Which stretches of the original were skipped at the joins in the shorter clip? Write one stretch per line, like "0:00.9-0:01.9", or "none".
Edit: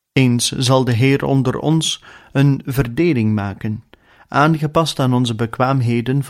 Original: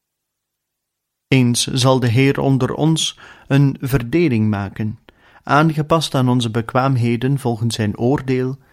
none